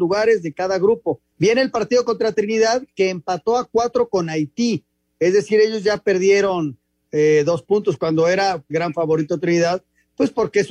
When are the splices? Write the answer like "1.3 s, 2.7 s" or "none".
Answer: 1.3 s